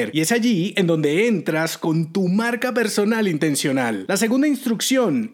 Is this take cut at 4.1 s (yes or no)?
no